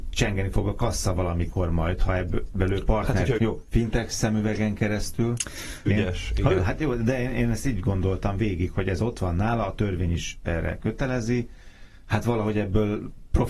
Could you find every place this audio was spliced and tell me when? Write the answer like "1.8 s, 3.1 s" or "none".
3.4 s, 5.9 s